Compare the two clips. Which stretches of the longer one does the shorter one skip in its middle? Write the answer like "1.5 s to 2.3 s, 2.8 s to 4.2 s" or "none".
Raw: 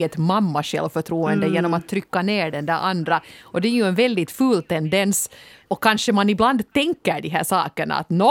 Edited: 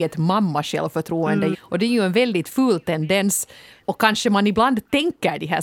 1.5 s to 3.3 s